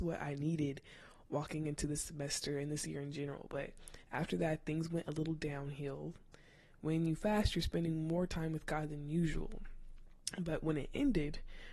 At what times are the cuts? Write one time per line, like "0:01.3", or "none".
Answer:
none

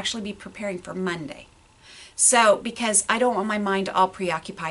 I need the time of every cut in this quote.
none

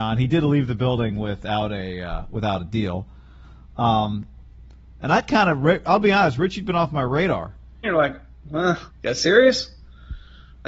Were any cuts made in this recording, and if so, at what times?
0:07.8
0:08.9

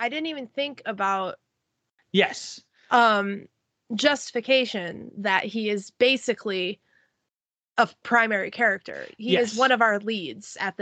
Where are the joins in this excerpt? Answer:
0:02.0

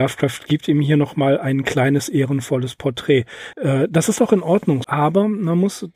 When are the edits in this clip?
0:03.5
0:04.8

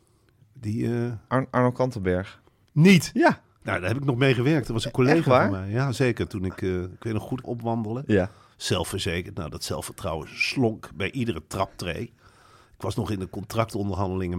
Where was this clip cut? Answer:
0:07.4

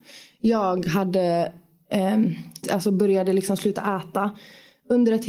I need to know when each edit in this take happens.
0:02.6

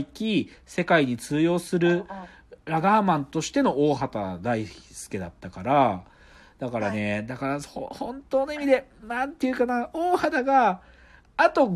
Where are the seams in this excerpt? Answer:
none

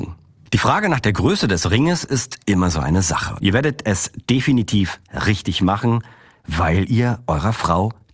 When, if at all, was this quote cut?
0:03.4

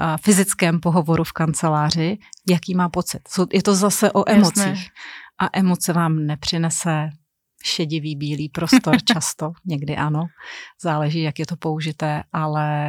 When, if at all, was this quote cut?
none

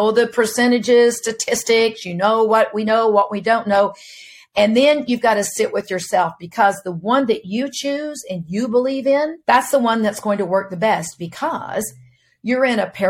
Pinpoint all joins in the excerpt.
0:09.4

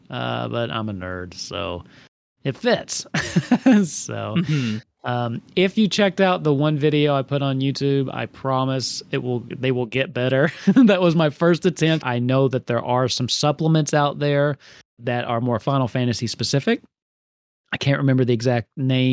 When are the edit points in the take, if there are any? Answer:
0:12.0
0:15.0

